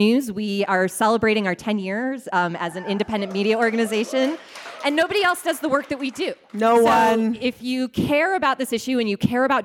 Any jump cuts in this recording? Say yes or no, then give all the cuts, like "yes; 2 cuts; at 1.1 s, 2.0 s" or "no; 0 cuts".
no; 0 cuts